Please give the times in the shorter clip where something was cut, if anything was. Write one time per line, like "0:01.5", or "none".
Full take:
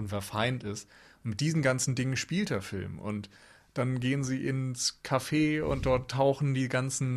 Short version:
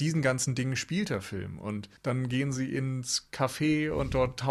0:02.0